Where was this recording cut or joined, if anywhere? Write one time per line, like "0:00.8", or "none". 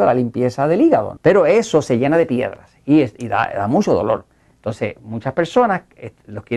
0:01.2